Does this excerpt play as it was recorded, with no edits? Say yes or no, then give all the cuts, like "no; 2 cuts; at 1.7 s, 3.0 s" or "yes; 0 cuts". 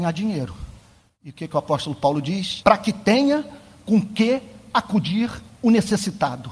no; 1 cut; at 2.6 s